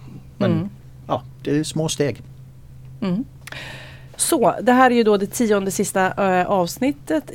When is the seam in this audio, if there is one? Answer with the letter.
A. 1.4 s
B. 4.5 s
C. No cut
A